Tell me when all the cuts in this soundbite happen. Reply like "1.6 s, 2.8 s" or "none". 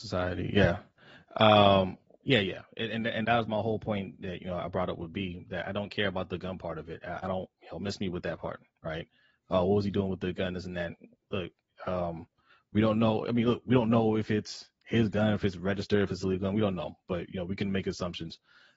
2.2 s, 3.2 s